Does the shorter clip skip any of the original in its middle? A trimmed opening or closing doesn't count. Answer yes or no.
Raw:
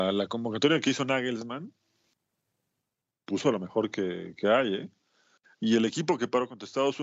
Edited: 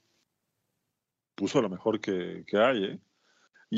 no